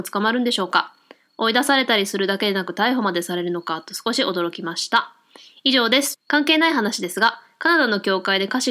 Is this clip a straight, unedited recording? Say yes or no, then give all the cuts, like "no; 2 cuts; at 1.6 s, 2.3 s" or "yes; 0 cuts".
no; 1 cut; at 6.1 s